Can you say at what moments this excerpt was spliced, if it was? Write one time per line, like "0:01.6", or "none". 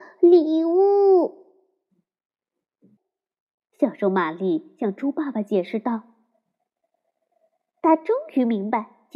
0:03.0